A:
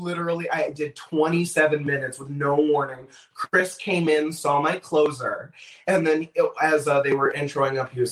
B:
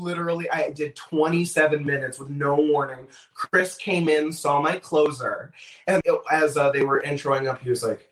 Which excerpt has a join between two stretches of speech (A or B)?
B